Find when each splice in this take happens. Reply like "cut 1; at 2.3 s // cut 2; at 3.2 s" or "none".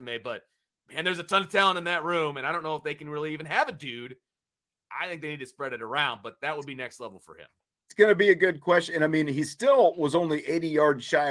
none